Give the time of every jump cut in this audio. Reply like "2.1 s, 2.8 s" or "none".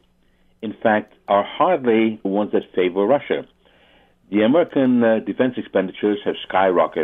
2.2 s